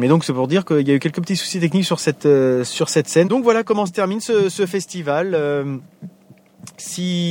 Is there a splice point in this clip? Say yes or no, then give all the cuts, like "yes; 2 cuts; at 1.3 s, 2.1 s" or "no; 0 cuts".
yes; 1 cut; at 3.2 s